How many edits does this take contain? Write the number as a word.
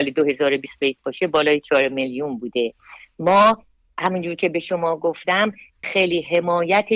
one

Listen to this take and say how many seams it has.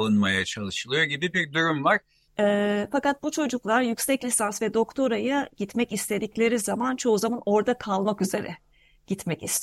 one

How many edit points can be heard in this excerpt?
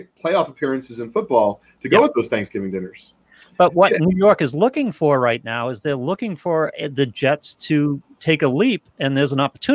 zero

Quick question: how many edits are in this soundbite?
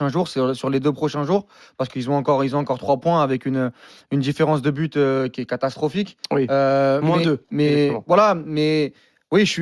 zero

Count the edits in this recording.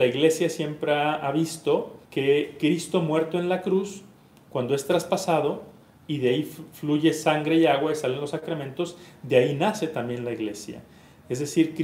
one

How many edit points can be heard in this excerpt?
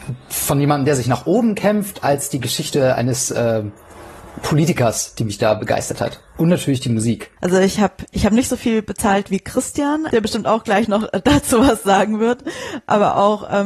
two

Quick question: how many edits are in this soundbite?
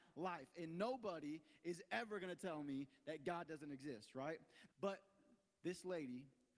one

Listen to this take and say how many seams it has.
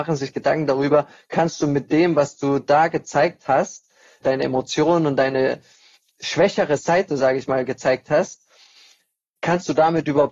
one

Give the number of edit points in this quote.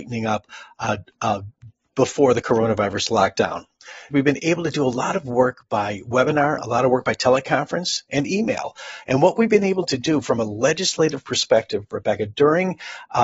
two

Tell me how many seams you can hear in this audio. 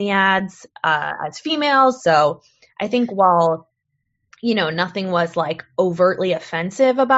one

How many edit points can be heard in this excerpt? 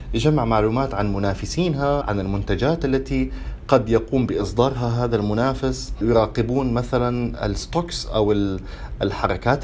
one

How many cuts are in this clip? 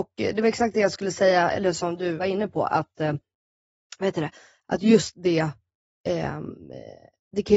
one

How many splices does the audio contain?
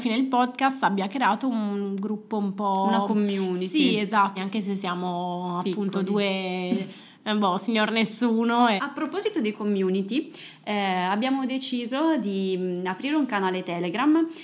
two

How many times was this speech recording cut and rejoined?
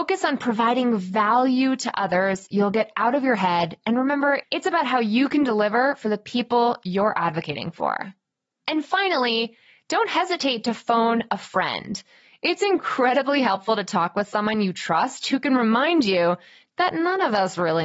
one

